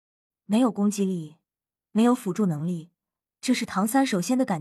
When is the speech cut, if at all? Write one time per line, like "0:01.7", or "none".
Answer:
0:01.8
0:03.2

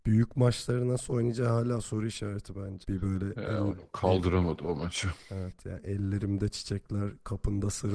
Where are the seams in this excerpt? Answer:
0:02.8

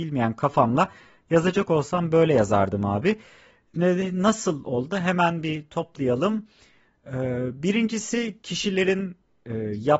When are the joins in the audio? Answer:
none

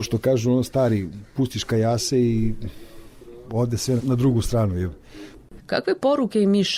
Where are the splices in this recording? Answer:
0:04.0
0:05.6

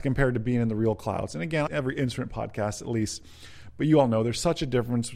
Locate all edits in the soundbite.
0:01.7

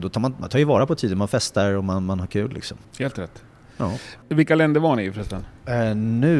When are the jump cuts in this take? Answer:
0:02.8

